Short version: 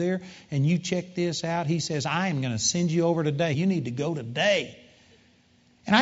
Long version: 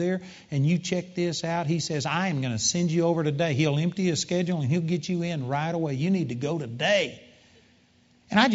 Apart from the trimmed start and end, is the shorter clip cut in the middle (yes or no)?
yes